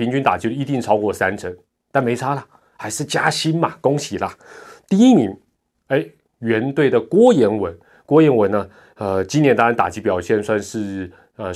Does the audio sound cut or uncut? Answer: uncut